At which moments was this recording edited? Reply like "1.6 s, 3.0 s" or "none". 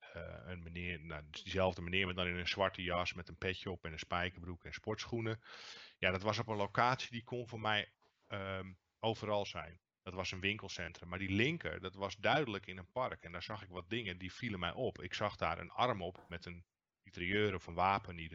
none